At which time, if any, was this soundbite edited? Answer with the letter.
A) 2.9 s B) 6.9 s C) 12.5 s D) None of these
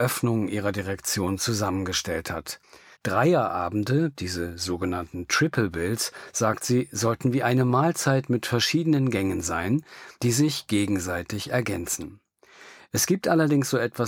A